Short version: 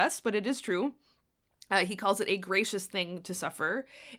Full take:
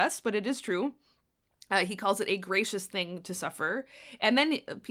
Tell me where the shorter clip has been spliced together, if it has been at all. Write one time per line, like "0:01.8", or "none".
none